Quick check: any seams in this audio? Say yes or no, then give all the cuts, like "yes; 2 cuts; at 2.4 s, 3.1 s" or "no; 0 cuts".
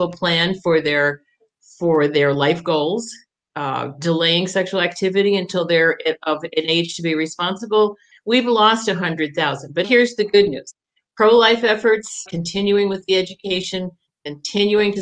yes; 3 cuts; at 8.1 s, 9.8 s, 12.3 s